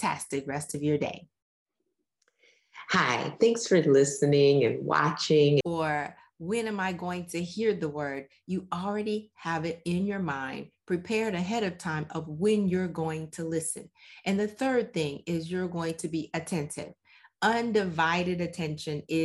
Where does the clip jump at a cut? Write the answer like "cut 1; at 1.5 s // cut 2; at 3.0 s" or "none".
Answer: cut 1; at 5.6 s